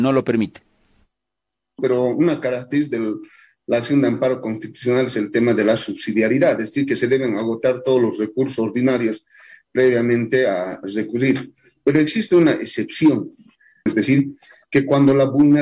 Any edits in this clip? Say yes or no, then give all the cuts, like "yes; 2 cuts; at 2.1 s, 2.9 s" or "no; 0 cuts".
yes; 2 cuts; at 1.8 s, 13.9 s